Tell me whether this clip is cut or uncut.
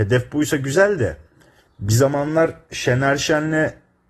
cut